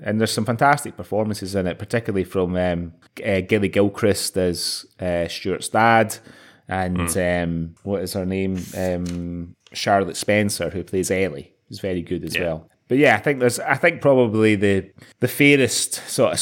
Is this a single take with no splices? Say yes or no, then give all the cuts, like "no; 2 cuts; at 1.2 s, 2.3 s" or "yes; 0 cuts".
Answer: yes; 0 cuts